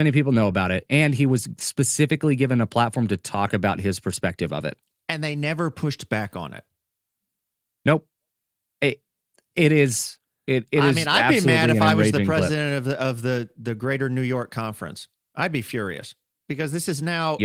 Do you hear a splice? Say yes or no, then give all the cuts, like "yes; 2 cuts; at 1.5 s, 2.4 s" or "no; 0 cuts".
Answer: no; 0 cuts